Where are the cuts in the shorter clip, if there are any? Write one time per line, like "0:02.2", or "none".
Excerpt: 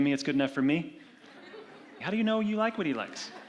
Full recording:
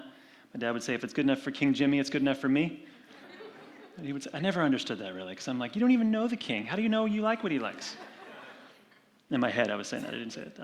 0:02.0

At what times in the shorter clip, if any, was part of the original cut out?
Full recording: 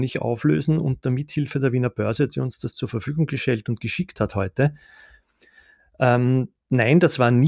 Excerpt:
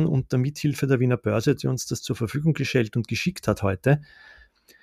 none

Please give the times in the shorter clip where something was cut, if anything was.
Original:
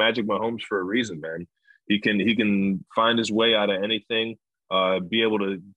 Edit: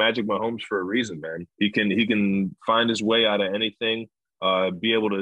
0:01.5

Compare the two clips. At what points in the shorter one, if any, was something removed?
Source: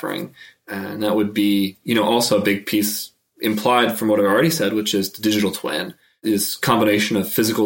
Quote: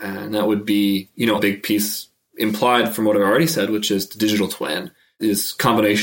0:01.4

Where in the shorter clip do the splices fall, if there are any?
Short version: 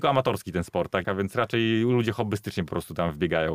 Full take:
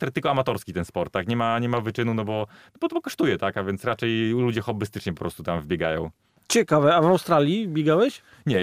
0:01.0

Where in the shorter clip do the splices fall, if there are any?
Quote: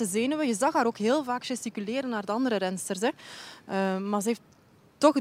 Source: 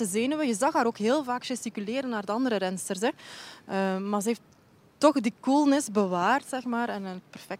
none

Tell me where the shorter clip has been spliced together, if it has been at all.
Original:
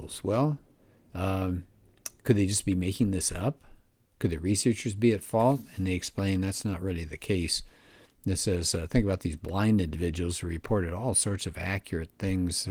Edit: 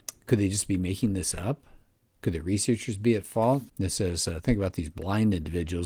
0:03.7

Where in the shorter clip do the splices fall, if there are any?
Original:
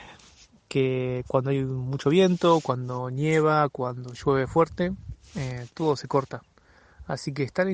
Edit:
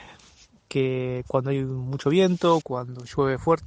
0:02.6

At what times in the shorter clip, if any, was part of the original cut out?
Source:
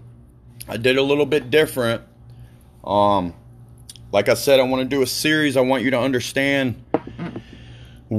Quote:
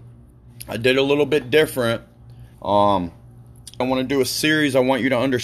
0:02.5
0:03.8

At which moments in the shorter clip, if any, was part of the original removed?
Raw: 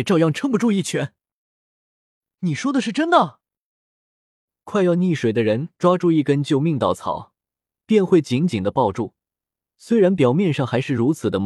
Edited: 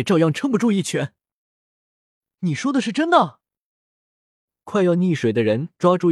none

